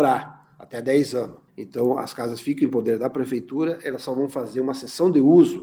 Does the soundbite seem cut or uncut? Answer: cut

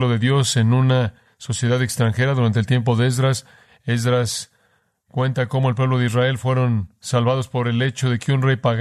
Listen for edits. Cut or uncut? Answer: uncut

